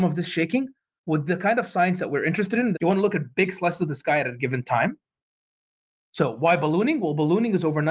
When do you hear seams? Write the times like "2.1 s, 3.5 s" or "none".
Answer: 1.0 s, 2.7 s, 6.0 s